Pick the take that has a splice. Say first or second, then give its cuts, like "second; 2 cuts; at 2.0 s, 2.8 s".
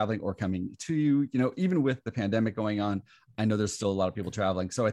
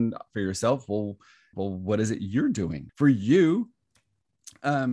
second; 2 cuts; at 1.5 s, 2.9 s